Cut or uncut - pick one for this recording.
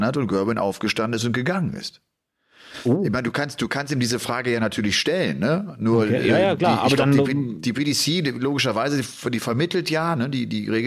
uncut